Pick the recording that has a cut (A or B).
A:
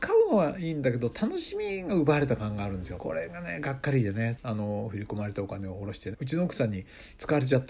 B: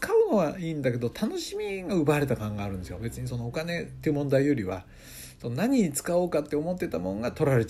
A